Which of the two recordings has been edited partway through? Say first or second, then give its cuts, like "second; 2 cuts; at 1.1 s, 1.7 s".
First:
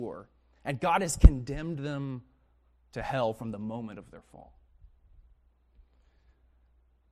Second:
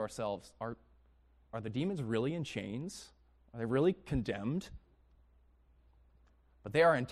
second; 1 cut; at 1.5 s